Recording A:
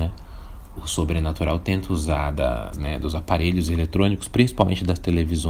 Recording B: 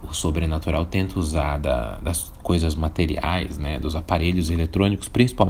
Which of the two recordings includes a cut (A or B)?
A